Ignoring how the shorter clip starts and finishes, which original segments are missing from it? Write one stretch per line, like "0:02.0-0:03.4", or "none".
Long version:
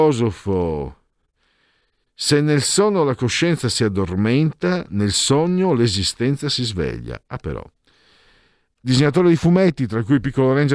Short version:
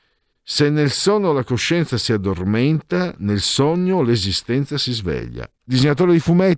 0:07.3-0:08.7